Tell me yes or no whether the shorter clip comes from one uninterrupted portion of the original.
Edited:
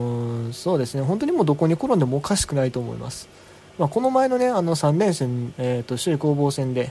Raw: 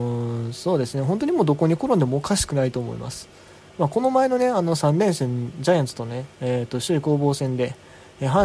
no